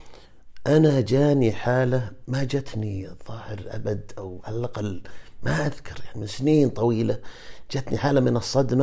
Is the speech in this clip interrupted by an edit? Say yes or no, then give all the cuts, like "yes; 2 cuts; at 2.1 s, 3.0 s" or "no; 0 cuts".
no; 0 cuts